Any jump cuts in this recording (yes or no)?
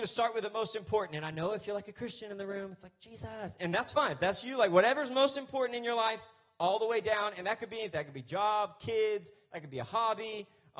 no